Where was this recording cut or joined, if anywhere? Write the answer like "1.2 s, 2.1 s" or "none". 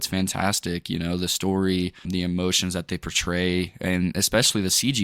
2.0 s